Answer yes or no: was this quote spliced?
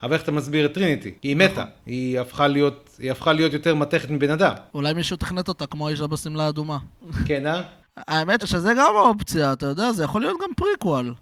yes